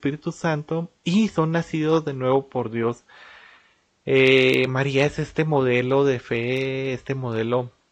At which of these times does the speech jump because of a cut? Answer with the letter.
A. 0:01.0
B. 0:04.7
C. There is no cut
A